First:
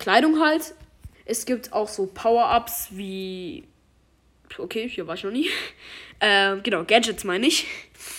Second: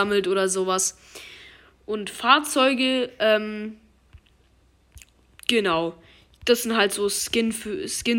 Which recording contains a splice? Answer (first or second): first